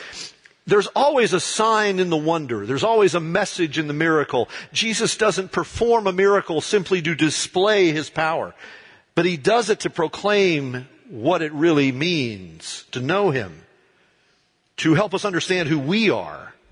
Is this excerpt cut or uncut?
uncut